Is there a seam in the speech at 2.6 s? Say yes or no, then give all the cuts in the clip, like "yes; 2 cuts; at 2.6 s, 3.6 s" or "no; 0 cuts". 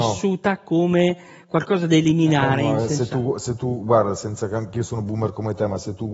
no; 0 cuts